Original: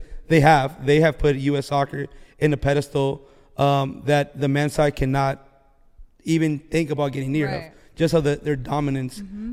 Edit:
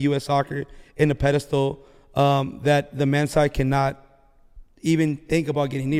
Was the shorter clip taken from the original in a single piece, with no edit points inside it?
yes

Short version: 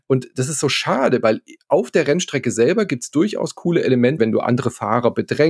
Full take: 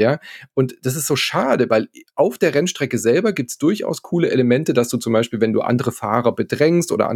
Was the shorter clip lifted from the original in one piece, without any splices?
no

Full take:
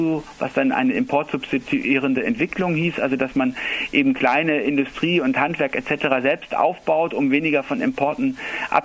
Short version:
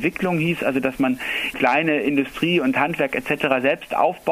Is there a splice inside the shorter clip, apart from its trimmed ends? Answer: yes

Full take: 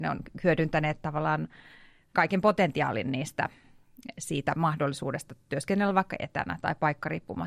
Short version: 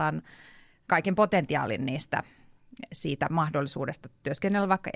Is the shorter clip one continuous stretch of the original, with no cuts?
yes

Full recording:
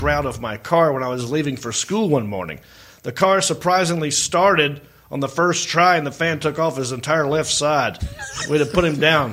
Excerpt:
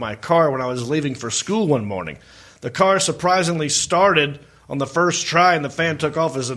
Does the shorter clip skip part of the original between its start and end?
no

